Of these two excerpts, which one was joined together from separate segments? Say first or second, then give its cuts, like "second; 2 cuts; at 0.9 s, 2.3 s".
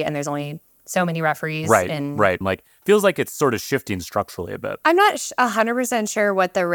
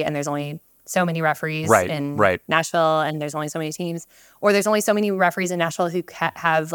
first; 1 cut; at 2.4 s